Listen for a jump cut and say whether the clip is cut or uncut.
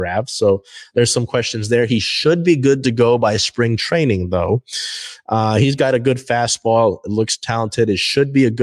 uncut